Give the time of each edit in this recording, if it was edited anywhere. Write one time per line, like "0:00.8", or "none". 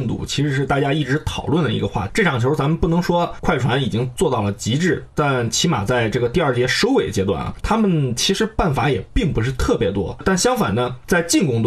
0:07.6